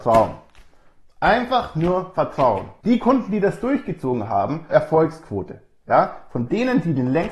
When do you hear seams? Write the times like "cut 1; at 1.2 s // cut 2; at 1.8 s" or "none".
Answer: cut 1; at 2.8 s // cut 2; at 4.7 s